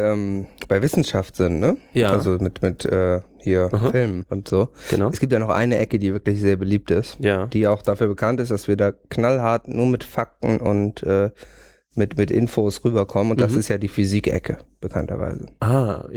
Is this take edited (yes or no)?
no